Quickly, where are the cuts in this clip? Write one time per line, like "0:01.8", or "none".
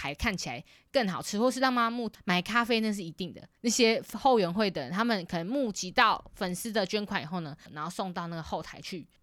0:02.1
0:07.7